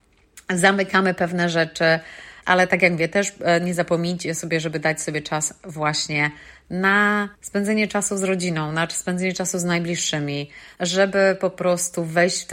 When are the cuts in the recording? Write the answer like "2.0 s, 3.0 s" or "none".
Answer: 2.4 s, 7.3 s, 10.7 s